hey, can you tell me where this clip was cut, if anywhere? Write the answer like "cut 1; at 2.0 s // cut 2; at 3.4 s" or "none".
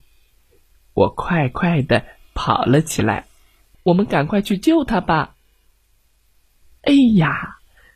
cut 1; at 3.7 s